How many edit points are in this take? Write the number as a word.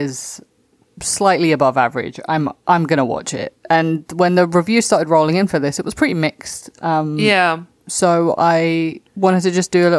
one